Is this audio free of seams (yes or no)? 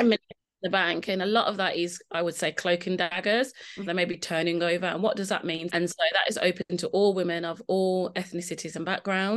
no